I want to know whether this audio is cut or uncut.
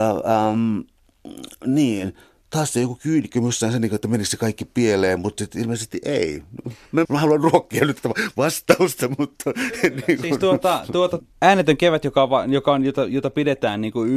cut